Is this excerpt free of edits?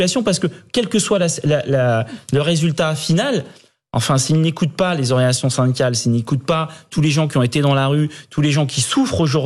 yes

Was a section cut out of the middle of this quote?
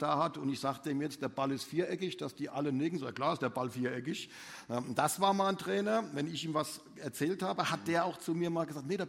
no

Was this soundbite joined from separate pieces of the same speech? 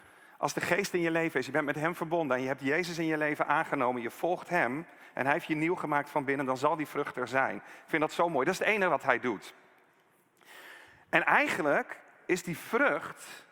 no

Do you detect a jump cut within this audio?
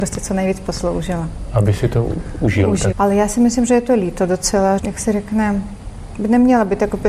yes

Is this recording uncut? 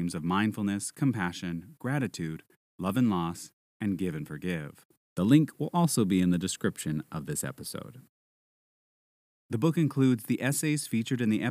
no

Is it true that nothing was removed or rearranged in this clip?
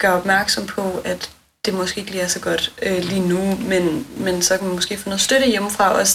yes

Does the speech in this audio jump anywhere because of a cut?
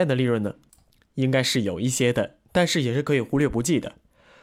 yes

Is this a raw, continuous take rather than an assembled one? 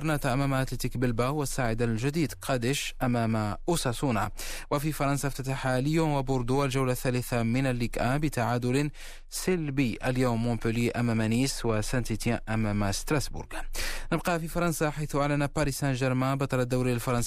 yes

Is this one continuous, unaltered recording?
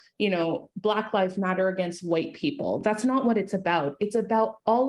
yes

